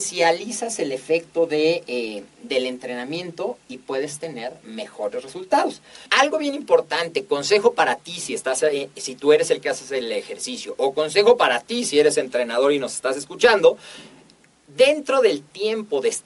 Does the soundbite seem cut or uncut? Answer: cut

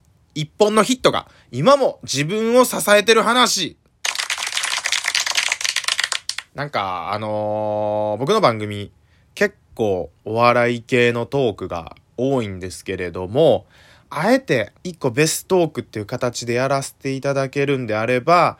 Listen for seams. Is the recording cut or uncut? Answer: cut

